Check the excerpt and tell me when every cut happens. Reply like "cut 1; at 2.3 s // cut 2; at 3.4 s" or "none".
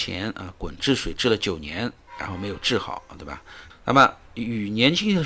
cut 1; at 3.7 s